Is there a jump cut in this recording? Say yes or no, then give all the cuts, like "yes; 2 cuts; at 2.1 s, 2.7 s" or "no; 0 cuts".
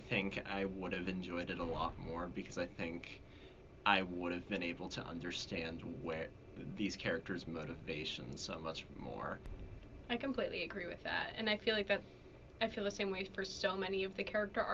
no; 0 cuts